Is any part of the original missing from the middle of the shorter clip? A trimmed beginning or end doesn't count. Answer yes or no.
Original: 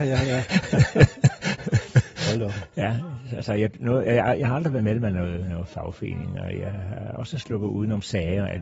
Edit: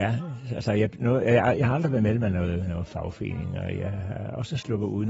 no